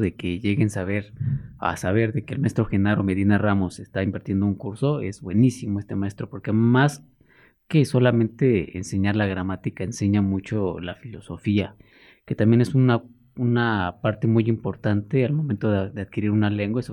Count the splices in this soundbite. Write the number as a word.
zero